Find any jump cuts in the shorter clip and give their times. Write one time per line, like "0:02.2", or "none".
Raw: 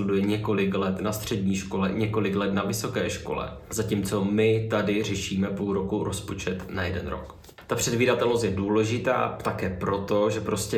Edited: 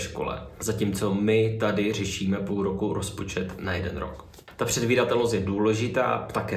none